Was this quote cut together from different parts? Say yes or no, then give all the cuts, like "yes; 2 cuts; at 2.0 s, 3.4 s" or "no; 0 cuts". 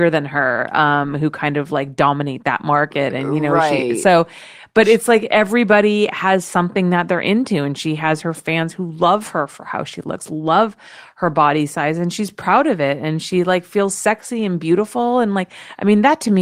no; 0 cuts